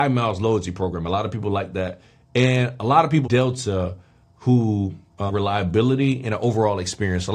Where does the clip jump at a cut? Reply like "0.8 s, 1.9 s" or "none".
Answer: 3.2 s, 5.3 s